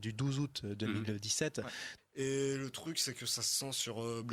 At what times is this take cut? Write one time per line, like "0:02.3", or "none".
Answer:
0:02.0

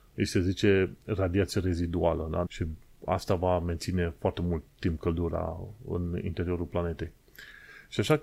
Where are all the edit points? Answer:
0:02.5

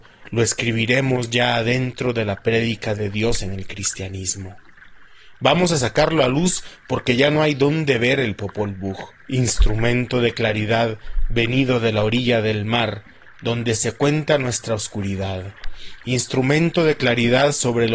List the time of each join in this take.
none

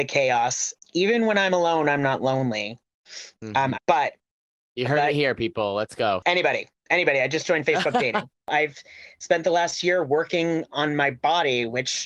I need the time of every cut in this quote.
0:03.7

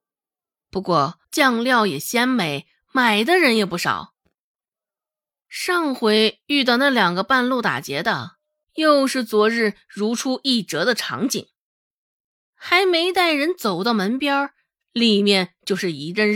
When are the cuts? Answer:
0:01.2
0:08.6

